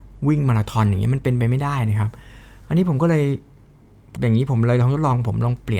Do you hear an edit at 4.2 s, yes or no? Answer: yes